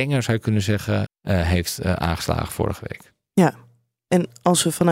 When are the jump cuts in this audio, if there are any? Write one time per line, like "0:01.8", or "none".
0:01.1